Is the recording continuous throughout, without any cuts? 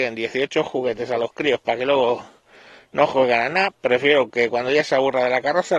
yes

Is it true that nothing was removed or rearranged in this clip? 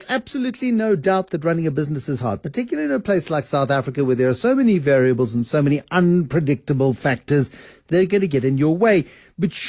yes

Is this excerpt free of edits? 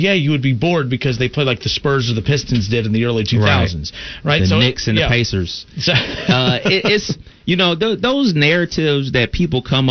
yes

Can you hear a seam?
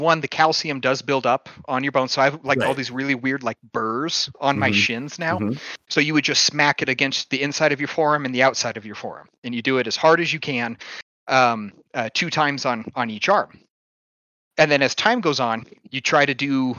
yes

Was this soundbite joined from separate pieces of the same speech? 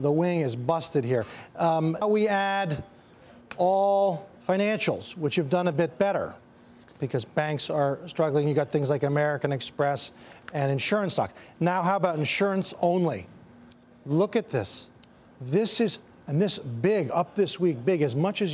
yes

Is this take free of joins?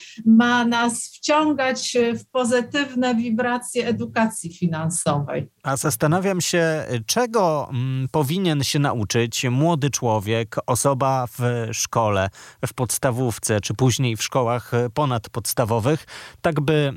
yes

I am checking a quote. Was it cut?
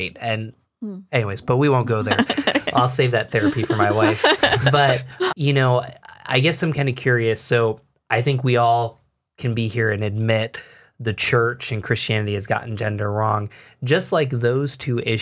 yes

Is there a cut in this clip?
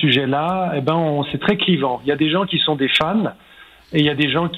no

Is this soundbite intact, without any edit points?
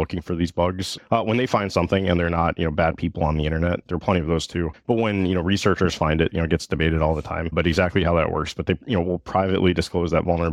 no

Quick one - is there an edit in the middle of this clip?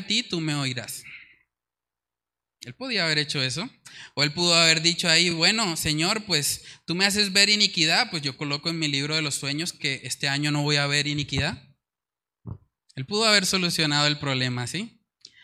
no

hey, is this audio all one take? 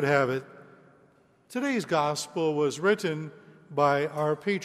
yes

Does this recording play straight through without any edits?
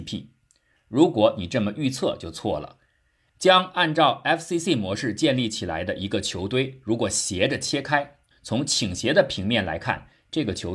no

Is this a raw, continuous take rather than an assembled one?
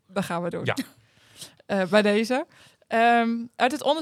yes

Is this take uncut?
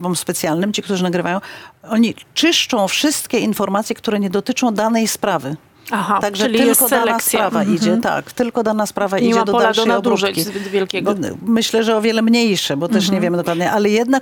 yes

